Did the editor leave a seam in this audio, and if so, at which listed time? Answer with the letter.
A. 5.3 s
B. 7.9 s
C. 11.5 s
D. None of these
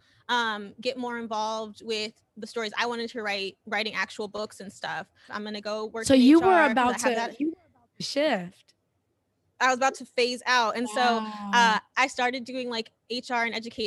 A